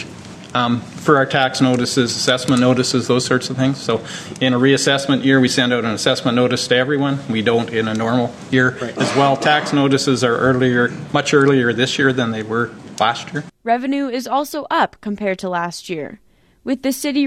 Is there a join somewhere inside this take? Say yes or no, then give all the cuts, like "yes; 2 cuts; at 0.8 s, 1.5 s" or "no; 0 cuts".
no; 0 cuts